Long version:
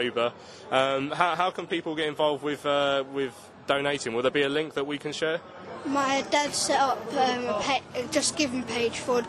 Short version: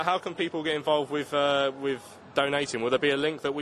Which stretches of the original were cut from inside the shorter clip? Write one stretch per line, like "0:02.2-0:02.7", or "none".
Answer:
none